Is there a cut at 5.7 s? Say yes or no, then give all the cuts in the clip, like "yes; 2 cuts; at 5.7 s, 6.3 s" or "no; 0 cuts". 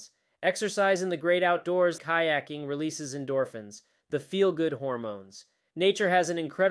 yes; 2 cuts; at 2.0 s, 5.7 s